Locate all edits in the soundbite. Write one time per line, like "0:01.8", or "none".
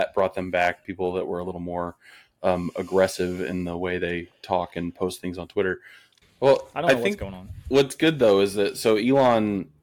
0:06.2